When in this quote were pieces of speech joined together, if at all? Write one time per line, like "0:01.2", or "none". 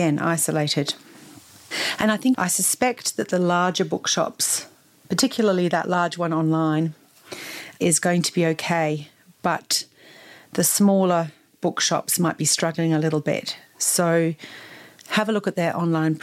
0:02.3